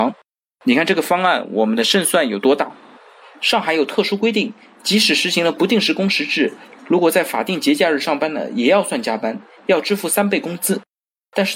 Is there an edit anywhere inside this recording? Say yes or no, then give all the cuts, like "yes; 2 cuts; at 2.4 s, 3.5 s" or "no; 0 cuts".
yes; 1 cut; at 3.2 s